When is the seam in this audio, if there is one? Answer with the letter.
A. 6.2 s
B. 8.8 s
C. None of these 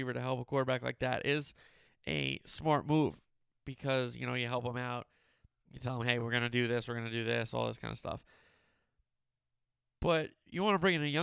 C